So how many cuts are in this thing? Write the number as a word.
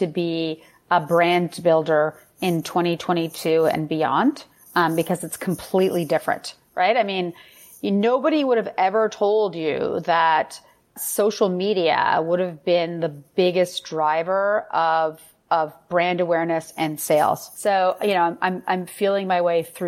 one